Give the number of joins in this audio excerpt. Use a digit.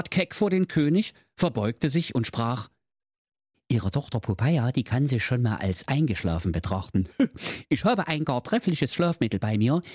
1